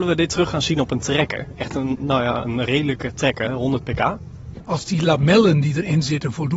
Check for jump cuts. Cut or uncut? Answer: cut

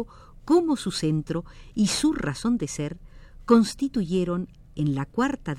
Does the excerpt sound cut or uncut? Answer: uncut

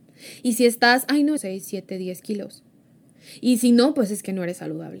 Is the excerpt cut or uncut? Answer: cut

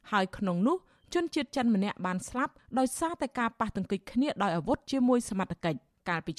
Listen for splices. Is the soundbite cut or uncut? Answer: uncut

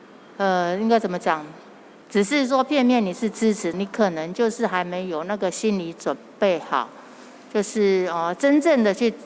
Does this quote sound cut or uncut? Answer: cut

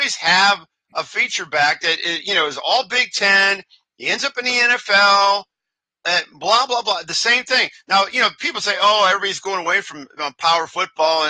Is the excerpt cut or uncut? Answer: uncut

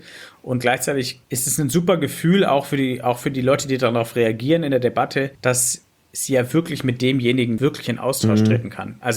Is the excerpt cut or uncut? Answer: cut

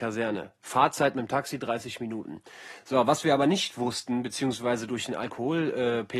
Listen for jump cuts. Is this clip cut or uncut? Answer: uncut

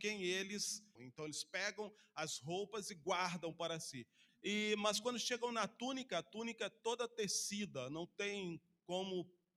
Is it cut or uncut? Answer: cut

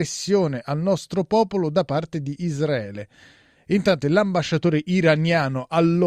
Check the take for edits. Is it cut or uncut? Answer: cut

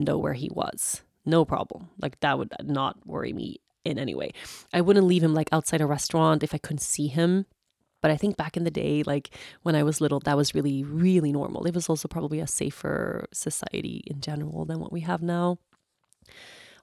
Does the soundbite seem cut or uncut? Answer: uncut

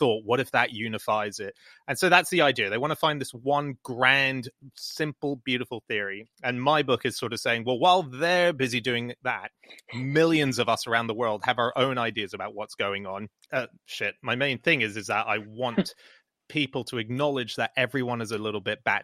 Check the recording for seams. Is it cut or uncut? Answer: cut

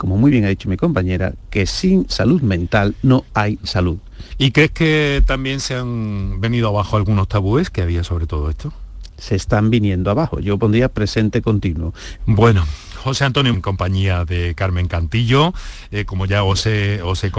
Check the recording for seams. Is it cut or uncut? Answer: cut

